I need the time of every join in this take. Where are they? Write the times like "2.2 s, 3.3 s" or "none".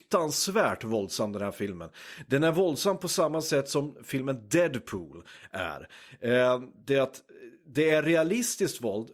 none